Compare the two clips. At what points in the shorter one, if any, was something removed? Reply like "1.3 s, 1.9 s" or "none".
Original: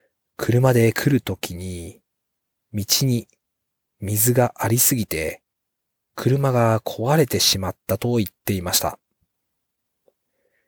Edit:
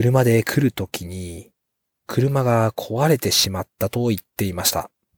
2.0 s